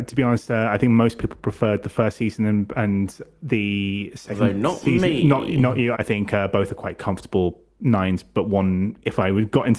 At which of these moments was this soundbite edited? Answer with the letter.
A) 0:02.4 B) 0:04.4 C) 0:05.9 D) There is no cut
C